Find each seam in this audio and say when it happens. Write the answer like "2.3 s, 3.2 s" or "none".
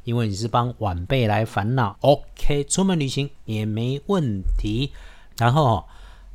1.9 s, 5.3 s